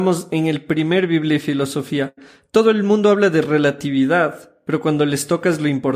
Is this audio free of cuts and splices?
yes; 0 cuts

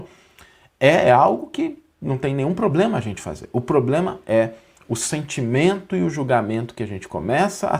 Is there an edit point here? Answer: no; 0 cuts

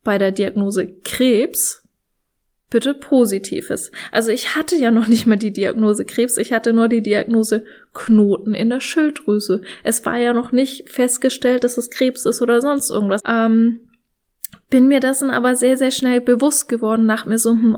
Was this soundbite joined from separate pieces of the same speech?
yes; 1 cut; at 13.2 s

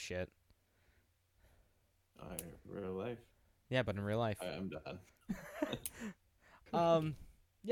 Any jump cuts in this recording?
no; 0 cuts

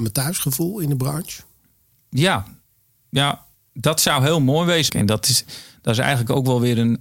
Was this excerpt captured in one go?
no; 1 cut; at 4.9 s

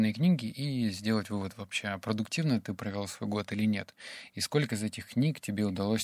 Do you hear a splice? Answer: no; 0 cuts

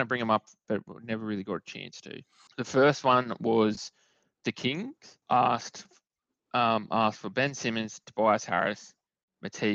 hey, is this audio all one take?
no; 2 cuts; at 2.5 s, 5.2 s

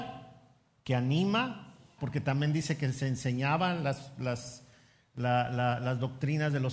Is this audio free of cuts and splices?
no; 1 cut; at 2.0 s

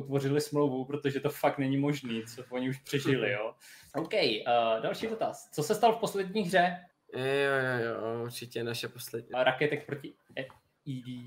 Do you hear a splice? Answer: yes; 3 cuts; at 3.9 s, 6.9 s, 9.3 s

